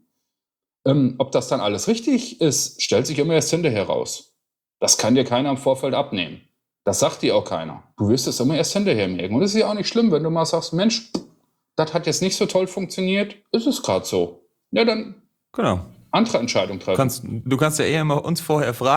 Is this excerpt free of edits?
yes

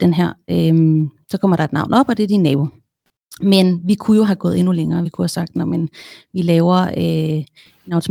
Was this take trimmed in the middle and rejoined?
no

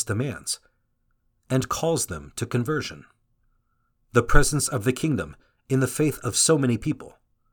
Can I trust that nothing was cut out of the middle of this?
no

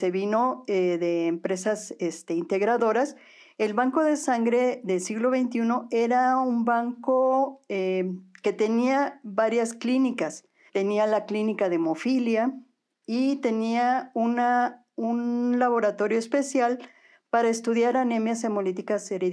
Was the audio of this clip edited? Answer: yes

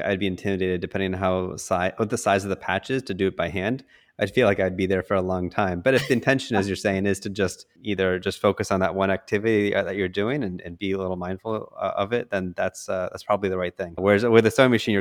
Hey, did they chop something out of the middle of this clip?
no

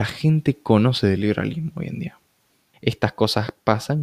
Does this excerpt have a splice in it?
yes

